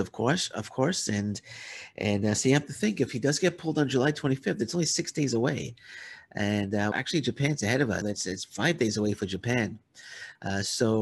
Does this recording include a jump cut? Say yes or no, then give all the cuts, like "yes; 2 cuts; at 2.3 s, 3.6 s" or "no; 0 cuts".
yes; 2 cuts; at 6.9 s, 8.0 s